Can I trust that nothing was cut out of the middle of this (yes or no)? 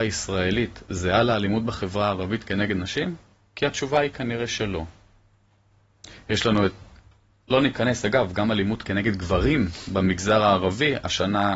yes